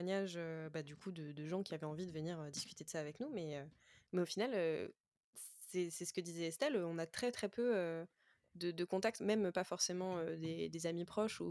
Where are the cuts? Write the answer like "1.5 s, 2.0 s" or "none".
none